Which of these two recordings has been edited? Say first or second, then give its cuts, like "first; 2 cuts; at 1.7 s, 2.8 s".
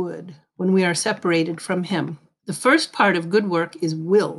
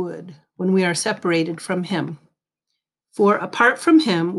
first; 1 cut; at 2.4 s